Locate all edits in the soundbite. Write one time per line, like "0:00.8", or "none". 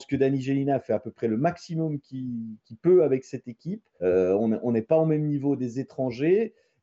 0:04.0